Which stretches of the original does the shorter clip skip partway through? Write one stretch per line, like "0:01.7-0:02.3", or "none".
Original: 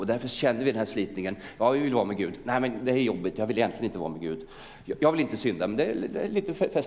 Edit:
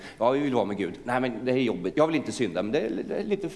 0:03.3-0:05.0

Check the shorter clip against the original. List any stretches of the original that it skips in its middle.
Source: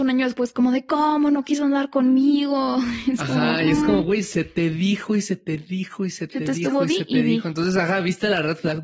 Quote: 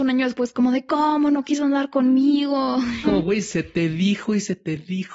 0:03.0-0:03.8

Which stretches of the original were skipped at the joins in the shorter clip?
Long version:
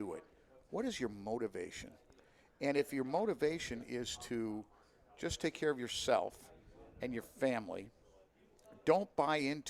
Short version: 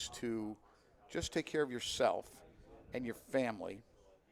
none

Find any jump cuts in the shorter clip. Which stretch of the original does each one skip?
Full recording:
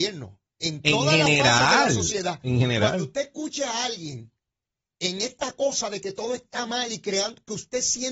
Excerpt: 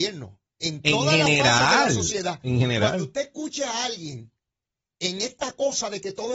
none

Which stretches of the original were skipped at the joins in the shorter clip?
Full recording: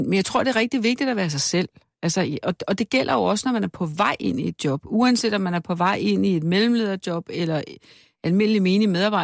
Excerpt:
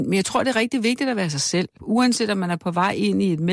0:01.8-0:04.8

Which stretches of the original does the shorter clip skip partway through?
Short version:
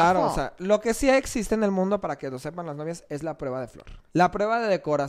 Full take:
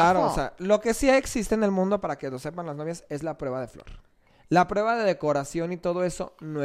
0:04.1-0:04.4

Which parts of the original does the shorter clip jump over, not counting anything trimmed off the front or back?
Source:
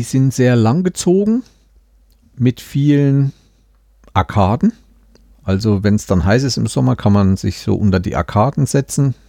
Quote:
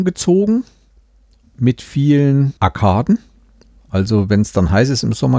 0:03.4-0:04.1

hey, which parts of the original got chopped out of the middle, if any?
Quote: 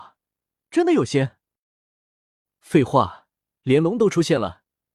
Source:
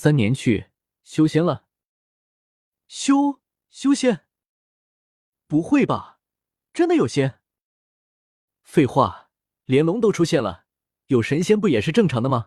none

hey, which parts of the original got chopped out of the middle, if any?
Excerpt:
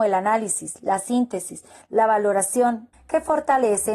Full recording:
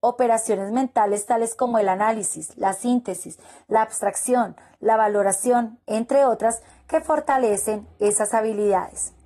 0:03.6-0:04.7
0:05.8-0:06.7

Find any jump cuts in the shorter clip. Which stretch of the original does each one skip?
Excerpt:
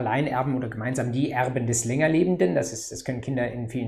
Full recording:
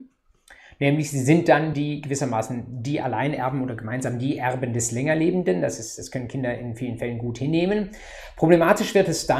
none

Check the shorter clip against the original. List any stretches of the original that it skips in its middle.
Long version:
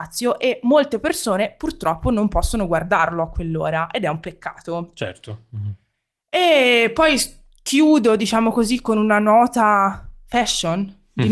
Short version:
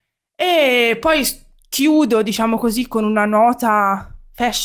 none

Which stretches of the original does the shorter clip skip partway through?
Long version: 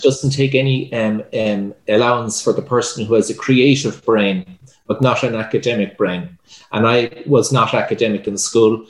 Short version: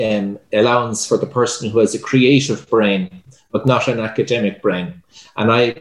none

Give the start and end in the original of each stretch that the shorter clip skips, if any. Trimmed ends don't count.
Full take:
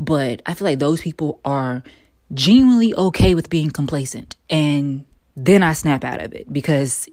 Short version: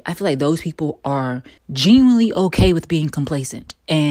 0:02.0-0:02.2

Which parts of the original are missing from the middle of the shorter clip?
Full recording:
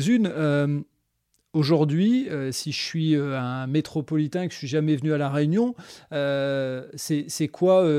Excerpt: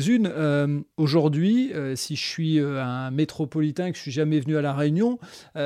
0:00.9-0:01.5

